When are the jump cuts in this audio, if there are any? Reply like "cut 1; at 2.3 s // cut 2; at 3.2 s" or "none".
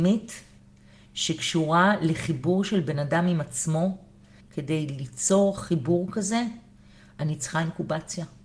cut 1; at 4.4 s